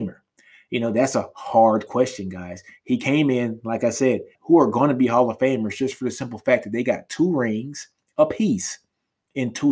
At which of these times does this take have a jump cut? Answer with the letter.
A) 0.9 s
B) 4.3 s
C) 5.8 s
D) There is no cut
B